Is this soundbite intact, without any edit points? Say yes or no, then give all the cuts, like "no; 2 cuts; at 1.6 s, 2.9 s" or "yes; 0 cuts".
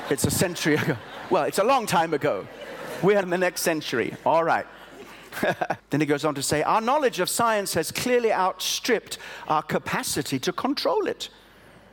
no; 2 cuts; at 3.2 s, 5.8 s